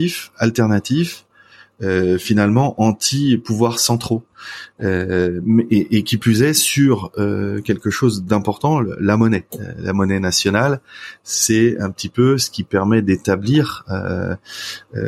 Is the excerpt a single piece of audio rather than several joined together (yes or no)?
yes